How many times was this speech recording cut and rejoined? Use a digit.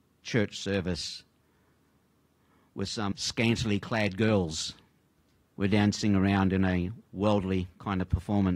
1